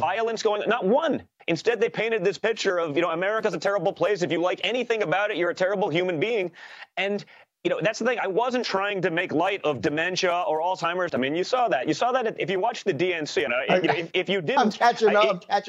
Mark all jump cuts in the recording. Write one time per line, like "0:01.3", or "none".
0:01.4
0:11.1
0:13.5